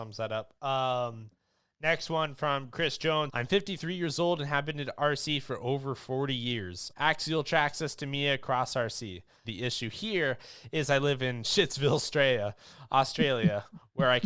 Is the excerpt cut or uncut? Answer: cut